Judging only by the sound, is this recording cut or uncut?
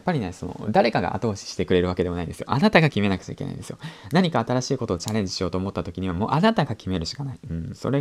uncut